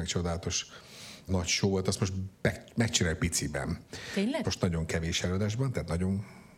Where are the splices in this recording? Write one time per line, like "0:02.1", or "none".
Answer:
0:01.3
0:04.4

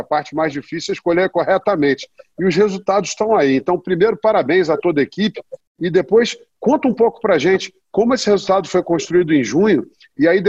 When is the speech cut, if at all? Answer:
none

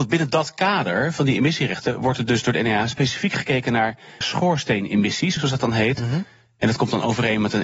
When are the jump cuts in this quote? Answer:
0:04.2
0:05.4

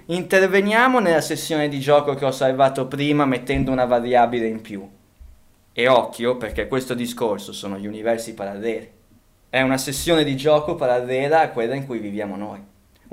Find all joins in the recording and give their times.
0:09.4

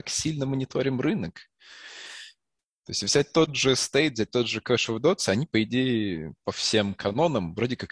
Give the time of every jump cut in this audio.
none

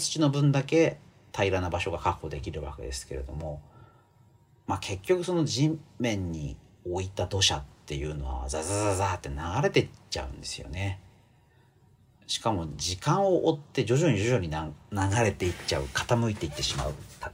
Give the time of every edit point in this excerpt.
none

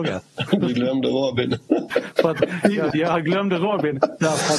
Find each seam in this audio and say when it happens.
0:01.9
0:02.9

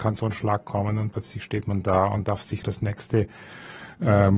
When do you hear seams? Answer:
0:02.6

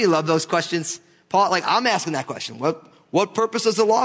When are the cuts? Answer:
none

